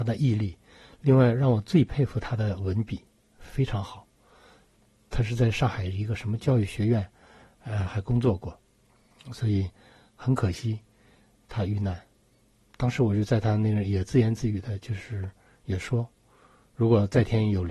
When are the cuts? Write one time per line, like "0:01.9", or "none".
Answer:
none